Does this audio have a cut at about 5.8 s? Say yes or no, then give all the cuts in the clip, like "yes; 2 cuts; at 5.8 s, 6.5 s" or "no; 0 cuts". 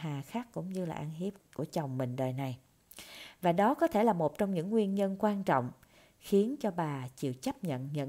no; 1 cut; at 1.4 s